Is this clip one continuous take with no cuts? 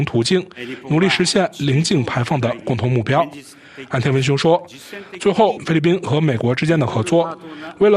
no; 1 cut; at 5.6 s

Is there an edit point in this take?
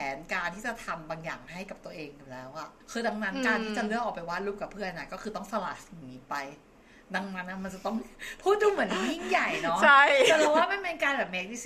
yes; 1 cut; at 2.8 s

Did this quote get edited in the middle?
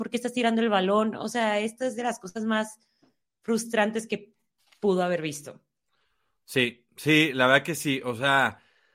no; 0 cuts

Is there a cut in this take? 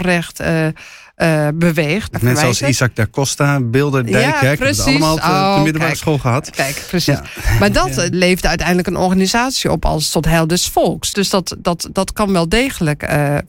yes; 3 cuts; at 2.1 s, 8.1 s, 11.1 s

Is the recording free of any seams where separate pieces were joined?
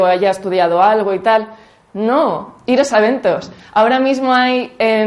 yes; 0 cuts

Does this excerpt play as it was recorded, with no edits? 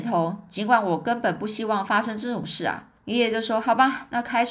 no; 1 cut; at 3.0 s

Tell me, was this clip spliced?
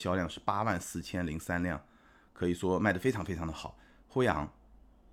no; 0 cuts

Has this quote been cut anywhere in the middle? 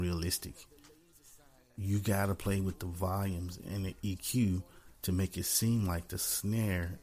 no; 0 cuts

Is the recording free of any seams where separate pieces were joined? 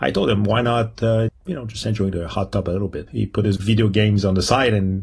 no; 2 cuts; at 1.3 s, 3.1 s

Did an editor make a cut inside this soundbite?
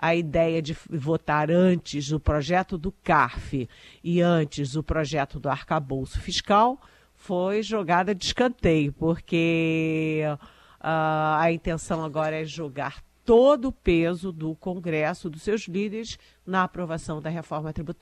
no; 0 cuts

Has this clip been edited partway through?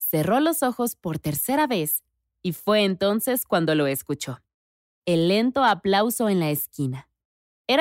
no; 0 cuts

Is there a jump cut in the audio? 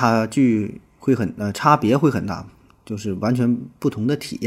no; 0 cuts

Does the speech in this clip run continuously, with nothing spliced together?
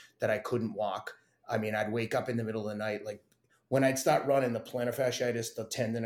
yes; 0 cuts

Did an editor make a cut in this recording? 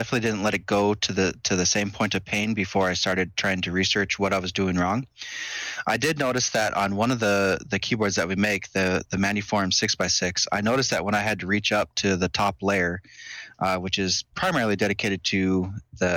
no; 0 cuts

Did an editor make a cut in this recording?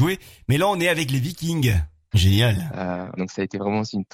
yes; 2 cuts; at 2.1 s, 3.2 s

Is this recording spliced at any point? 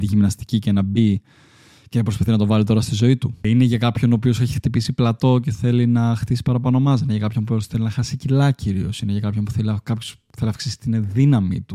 no; 0 cuts

